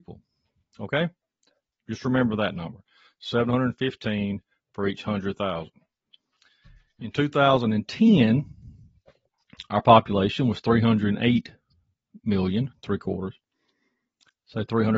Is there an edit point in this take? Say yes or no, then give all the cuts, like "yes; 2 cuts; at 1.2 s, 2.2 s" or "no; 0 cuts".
no; 0 cuts